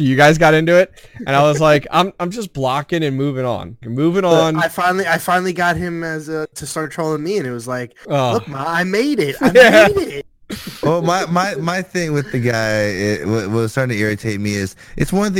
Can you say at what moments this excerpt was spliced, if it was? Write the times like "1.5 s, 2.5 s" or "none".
3.8 s